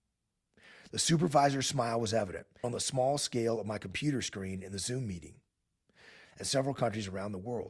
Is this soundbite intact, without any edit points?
no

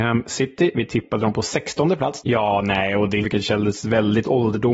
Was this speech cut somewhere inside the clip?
yes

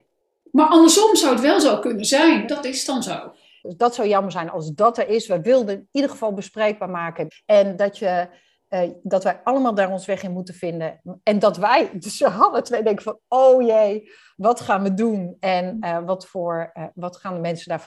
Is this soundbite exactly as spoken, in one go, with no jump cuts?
no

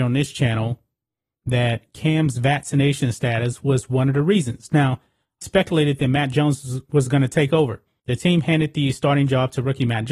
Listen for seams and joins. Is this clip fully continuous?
no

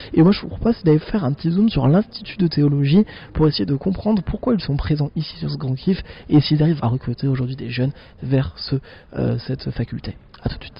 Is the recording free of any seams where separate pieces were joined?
no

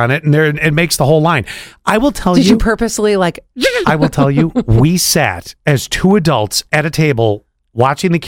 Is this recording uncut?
no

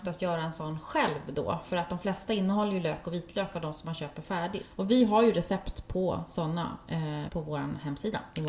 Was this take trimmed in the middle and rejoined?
yes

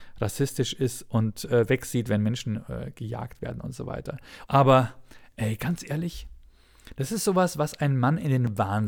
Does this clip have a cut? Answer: yes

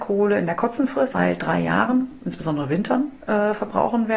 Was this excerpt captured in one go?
no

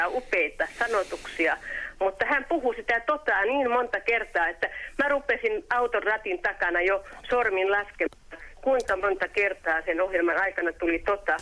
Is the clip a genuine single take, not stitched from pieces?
yes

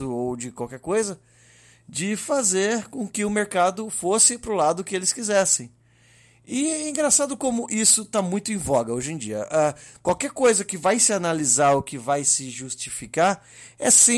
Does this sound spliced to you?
no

